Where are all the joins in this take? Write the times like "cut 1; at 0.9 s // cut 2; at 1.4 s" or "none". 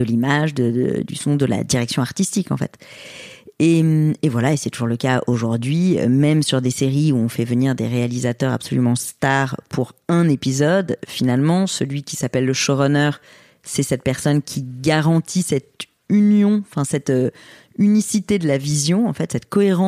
none